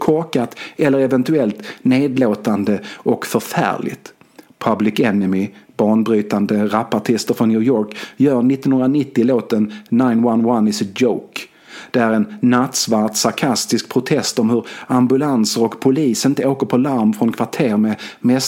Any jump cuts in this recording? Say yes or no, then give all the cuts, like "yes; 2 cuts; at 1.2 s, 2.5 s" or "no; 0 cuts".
no; 0 cuts